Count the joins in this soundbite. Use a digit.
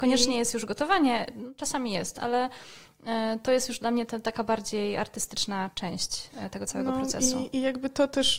0